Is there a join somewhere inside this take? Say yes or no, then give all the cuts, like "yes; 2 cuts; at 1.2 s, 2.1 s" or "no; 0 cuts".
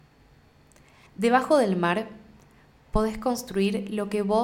yes; 1 cut; at 1.1 s